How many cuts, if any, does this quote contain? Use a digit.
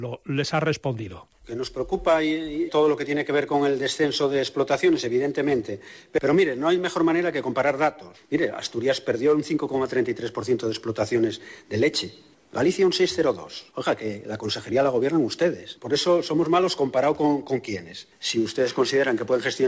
2